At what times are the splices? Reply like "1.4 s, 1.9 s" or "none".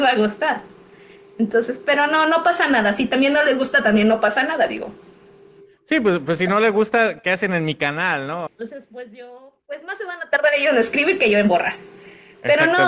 8.5 s, 9.6 s

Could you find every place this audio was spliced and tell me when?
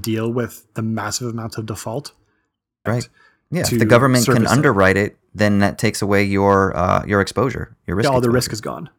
2.9 s

